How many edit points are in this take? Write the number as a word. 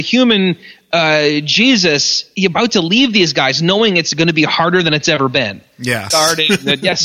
two